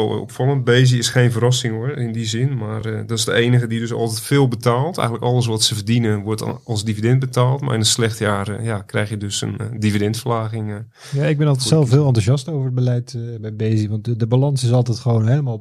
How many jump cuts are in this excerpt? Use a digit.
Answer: 0